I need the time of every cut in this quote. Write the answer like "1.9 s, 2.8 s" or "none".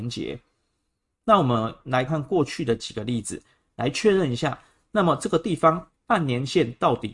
2.1 s